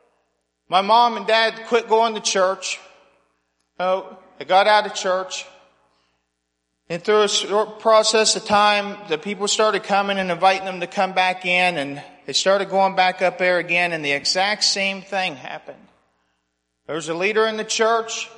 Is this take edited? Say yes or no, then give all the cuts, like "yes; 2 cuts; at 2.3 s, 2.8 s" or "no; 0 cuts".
no; 0 cuts